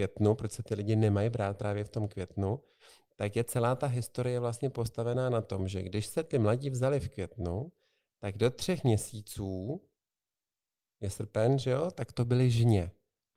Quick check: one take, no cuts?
yes; 0 cuts

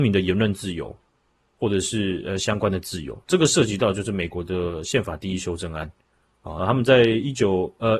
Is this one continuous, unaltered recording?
no; 1 cut; at 6.6 s

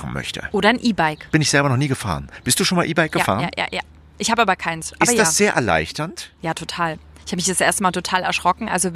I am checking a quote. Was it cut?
yes; 1 cut; at 1.3 s

